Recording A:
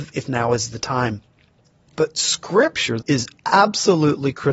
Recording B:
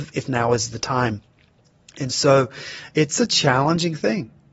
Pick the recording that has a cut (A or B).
A